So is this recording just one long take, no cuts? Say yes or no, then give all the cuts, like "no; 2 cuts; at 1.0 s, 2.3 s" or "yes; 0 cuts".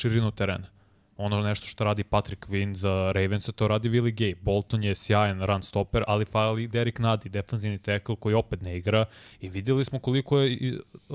yes; 0 cuts